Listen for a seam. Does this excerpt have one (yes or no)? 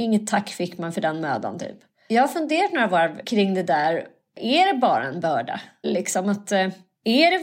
yes